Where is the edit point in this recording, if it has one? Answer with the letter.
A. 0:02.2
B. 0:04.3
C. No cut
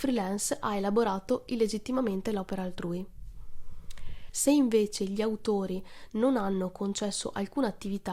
B